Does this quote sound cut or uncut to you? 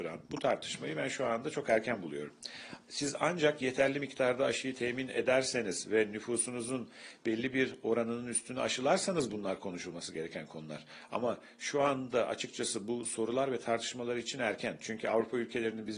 uncut